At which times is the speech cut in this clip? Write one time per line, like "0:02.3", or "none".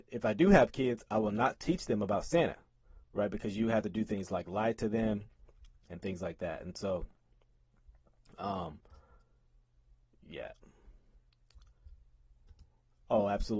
none